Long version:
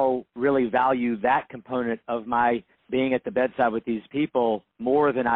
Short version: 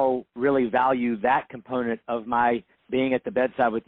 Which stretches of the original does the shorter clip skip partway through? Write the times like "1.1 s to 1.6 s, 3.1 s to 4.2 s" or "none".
none